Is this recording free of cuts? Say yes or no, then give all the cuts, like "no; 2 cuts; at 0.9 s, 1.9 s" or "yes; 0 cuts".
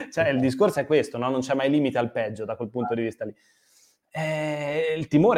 yes; 0 cuts